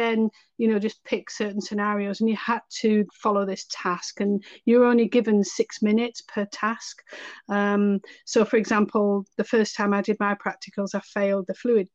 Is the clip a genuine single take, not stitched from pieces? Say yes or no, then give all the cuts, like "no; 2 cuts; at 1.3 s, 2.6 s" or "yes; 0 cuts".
no; 1 cut; at 3.1 s